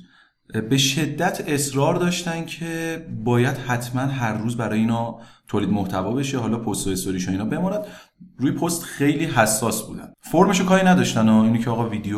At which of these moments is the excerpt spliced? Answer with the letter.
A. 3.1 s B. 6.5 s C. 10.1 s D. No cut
C